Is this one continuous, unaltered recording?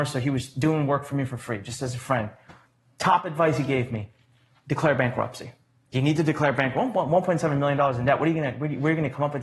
no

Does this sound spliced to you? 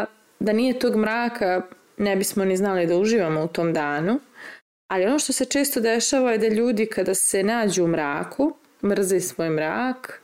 yes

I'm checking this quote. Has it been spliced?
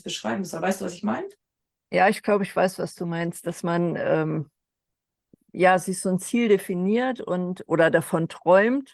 no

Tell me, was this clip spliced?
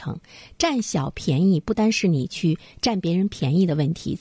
yes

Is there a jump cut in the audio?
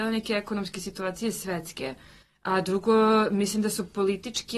no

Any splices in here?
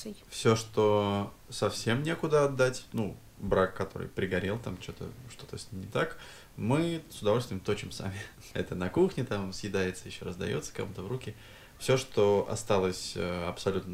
no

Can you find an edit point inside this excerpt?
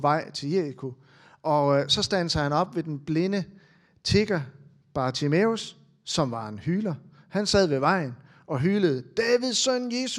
no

